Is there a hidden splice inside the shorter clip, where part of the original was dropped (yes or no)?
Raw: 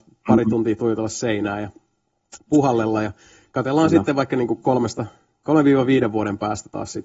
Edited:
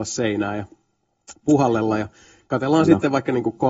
no